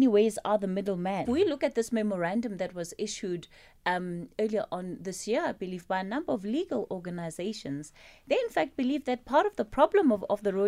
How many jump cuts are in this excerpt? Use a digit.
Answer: 1